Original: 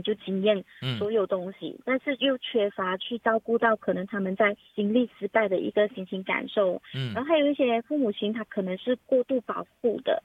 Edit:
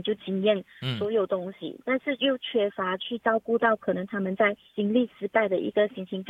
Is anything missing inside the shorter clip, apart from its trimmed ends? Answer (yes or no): no